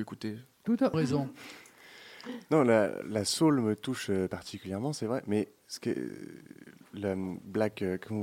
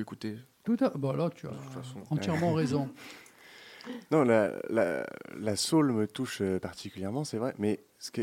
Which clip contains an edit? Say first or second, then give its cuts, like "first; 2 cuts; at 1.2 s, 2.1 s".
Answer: first; 2 cuts; at 0.9 s, 3.0 s